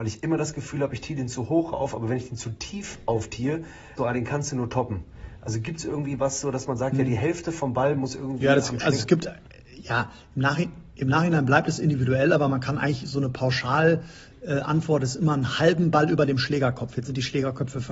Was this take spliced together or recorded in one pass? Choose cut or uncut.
cut